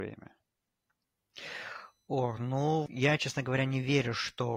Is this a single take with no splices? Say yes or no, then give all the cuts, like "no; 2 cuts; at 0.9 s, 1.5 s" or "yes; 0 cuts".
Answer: no; 1 cut; at 2.9 s